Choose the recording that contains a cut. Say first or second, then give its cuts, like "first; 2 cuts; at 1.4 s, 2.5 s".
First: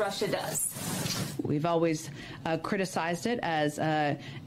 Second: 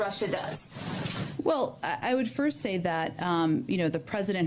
first; 1 cut; at 1.4 s